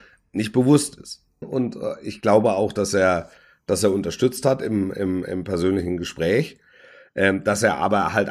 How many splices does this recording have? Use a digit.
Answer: 1